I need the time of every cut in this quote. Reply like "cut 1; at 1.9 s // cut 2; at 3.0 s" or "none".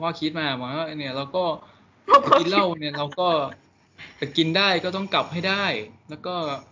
none